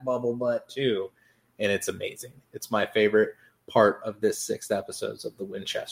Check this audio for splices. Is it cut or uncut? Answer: uncut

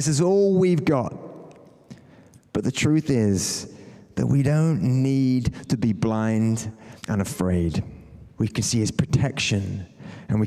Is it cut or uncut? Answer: cut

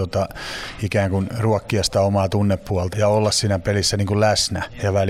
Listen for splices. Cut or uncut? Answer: cut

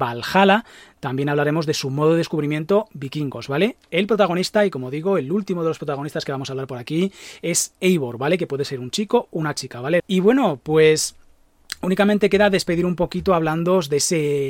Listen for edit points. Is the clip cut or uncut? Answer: cut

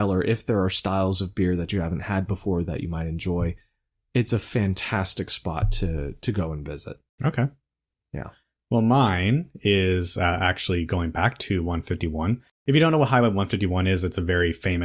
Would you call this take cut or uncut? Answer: uncut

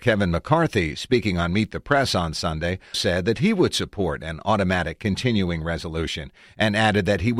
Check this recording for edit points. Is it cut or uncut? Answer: cut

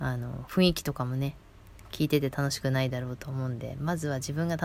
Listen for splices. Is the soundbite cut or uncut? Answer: uncut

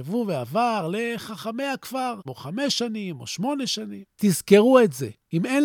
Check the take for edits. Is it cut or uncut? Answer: cut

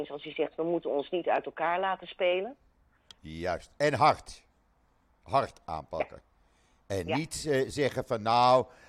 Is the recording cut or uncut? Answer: cut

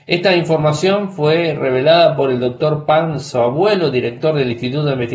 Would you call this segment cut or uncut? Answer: uncut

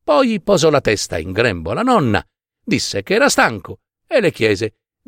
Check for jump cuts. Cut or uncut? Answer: uncut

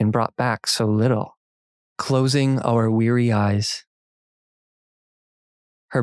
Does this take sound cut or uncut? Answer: cut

